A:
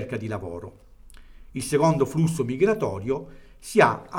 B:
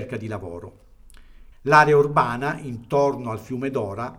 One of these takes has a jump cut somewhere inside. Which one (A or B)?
B